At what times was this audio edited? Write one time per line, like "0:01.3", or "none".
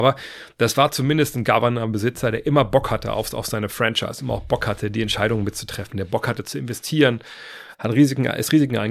0:07.7

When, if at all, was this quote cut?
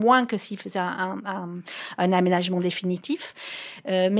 none

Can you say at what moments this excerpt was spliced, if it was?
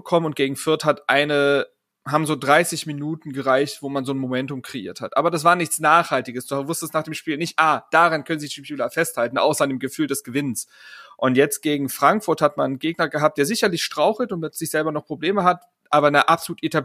none

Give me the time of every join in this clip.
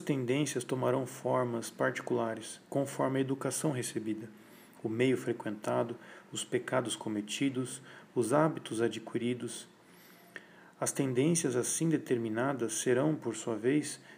none

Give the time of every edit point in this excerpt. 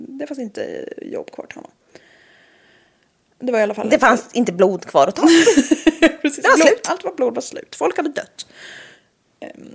none

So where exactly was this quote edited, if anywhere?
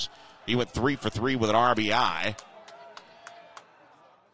none

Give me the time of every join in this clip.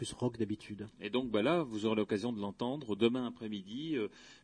0:00.9
0:03.0

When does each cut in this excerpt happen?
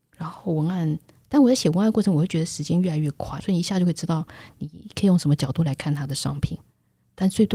0:03.4

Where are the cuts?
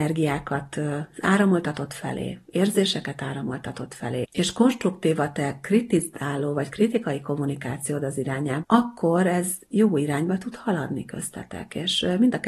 0:04.2
0:08.6

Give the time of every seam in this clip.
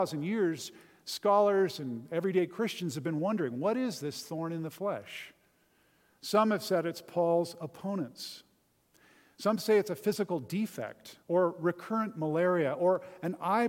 0:11.2

